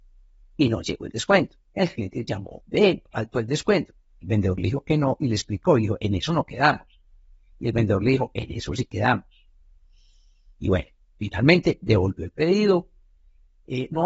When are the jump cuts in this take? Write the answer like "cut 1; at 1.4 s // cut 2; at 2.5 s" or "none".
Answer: none